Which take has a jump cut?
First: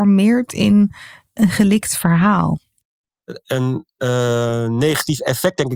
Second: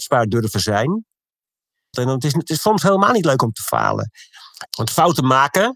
second; 2 cuts; at 1.9 s, 4.7 s

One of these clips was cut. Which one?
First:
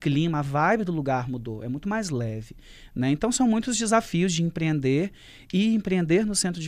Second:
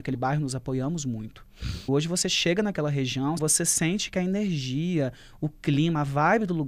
second; 2 cuts; at 1.9 s, 3.4 s

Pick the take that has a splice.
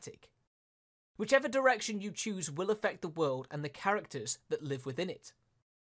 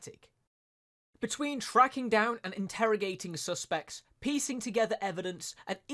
second; 1 cut; at 1.1 s

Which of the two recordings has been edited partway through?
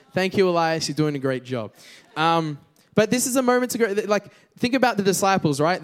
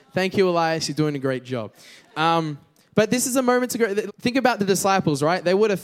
second; 1 cut; at 4.1 s

